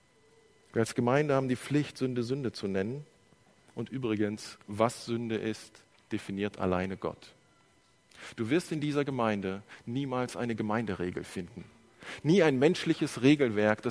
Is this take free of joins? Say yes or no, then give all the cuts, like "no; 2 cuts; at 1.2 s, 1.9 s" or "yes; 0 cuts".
yes; 0 cuts